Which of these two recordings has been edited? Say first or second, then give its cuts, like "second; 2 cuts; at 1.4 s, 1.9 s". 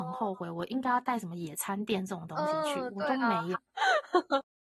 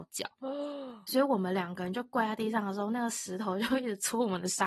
first; 1 cut; at 3.5 s